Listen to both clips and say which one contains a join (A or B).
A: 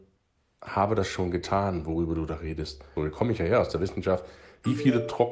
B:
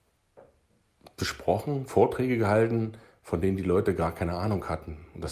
A